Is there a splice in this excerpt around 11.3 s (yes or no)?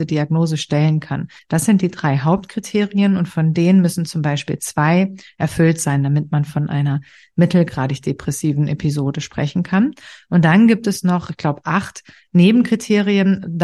no